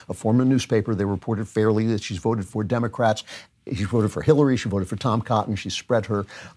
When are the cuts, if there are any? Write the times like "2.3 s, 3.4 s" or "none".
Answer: none

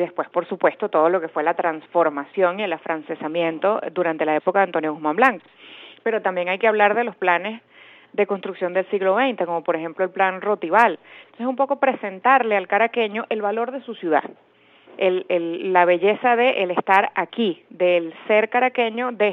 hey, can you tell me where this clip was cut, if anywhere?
none

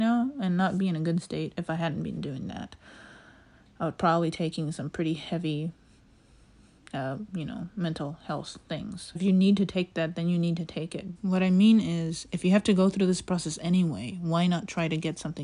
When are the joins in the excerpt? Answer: 9.1 s, 11.1 s

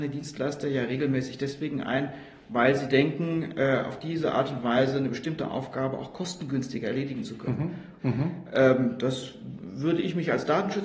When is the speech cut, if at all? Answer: 8.0 s

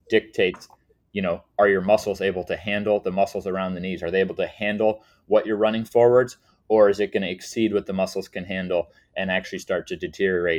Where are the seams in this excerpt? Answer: none

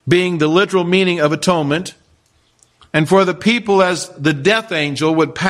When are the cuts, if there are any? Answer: none

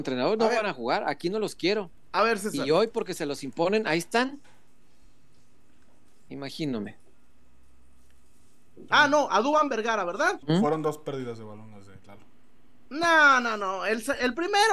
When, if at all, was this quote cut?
6.3 s, 8.9 s, 10.4 s

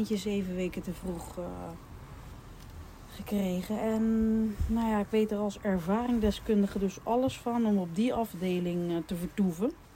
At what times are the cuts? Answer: none

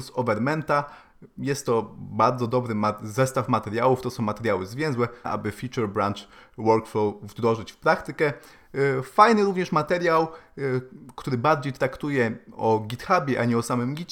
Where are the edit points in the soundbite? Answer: 5.2 s

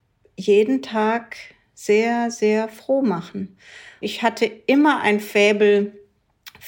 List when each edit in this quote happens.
4.0 s

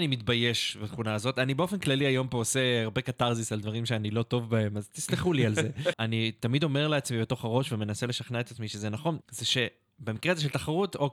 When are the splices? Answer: 5.9 s, 9.2 s

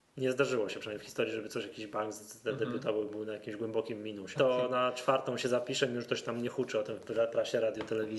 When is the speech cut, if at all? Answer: 4.3 s

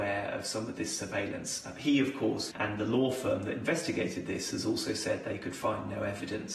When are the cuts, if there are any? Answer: 2.5 s

